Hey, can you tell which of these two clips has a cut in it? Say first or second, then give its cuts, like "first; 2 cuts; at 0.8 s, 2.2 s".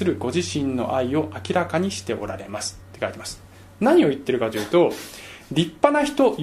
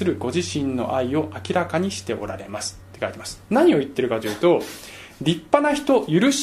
second; 1 cut; at 3.4 s